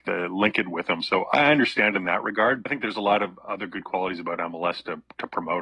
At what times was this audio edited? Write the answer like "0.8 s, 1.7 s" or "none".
2.7 s

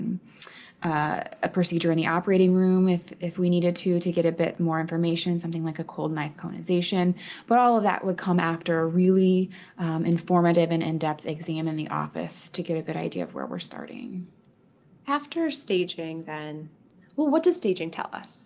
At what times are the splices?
none

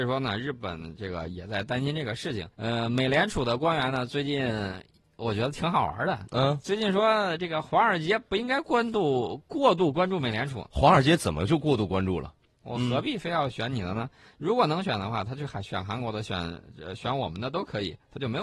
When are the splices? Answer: 2.5 s, 12.6 s

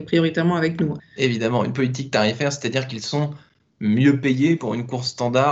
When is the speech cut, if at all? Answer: 1.0 s

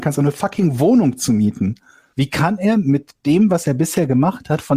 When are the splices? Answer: 2.1 s

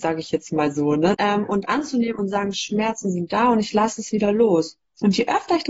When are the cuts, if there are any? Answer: 1.1 s

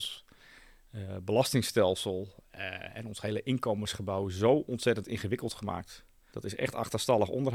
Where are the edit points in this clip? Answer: 6.3 s

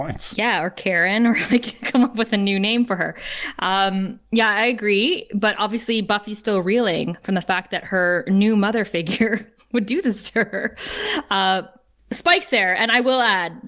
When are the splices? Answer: none

